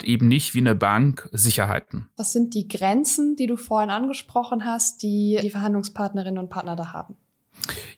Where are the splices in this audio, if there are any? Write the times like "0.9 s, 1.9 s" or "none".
2.2 s, 5.4 s